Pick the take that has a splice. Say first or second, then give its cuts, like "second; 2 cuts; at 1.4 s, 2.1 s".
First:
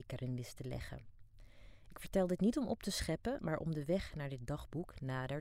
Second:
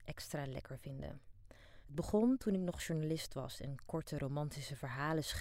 second; 1 cut; at 1.8 s